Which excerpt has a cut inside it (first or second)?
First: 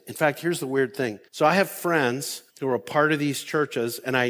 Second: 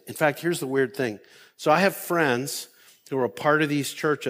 first